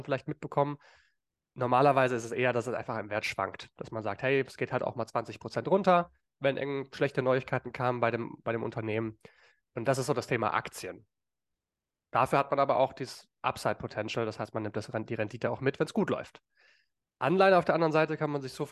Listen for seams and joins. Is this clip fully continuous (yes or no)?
yes